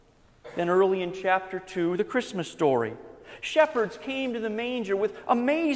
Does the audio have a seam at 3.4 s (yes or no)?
no